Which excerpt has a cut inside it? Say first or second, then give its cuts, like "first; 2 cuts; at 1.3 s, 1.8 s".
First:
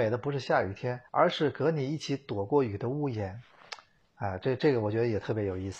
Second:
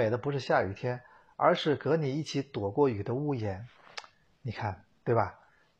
first; 2 cuts; at 1.1 s, 4.0 s